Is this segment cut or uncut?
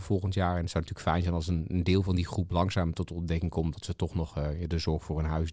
uncut